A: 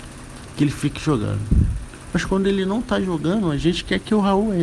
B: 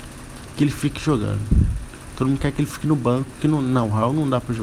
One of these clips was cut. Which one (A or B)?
A